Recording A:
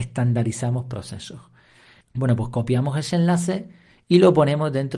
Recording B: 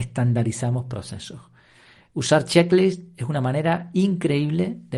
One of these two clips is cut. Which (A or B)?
A